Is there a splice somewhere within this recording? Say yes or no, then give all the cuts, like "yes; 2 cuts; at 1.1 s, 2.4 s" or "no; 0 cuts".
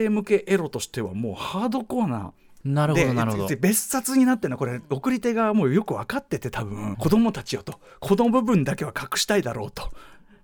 yes; 2 cuts; at 2.6 s, 6.9 s